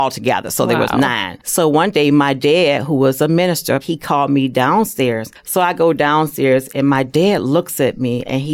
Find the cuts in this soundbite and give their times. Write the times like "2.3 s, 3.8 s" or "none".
3.8 s